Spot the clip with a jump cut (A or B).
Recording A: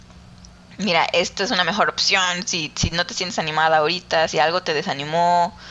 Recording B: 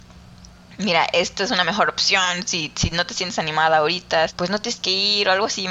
B